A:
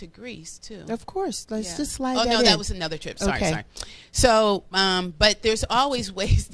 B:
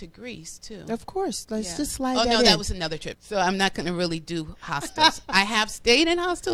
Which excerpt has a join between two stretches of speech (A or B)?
B